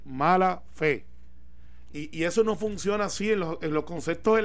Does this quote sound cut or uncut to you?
cut